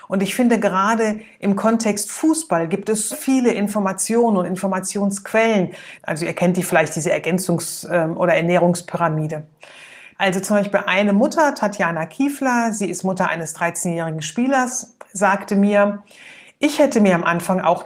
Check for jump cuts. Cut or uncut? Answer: cut